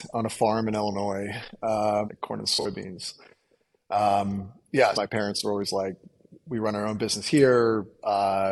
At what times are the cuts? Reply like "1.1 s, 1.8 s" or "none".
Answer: 2.1 s, 4.9 s